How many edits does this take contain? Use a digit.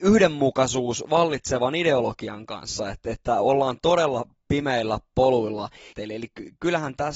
1